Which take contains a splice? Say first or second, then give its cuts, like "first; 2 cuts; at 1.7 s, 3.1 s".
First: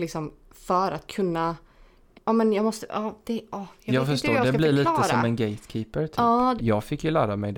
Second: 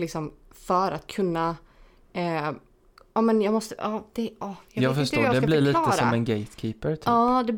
first; 2 cuts; at 2.1 s, 6.6 s